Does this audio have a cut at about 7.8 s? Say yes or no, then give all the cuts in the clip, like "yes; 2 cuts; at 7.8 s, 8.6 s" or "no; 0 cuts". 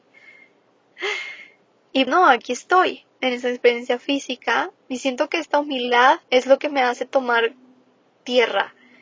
no; 3 cuts; at 0.9 s, 2.1 s, 6.2 s